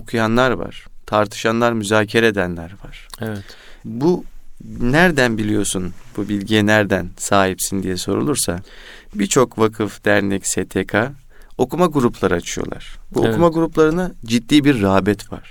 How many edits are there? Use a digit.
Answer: 0